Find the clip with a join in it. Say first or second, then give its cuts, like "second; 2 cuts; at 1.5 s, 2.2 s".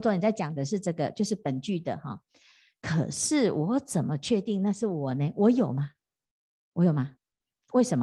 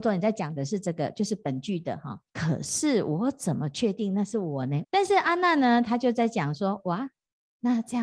second; 2 cuts; at 2.3 s, 4.8 s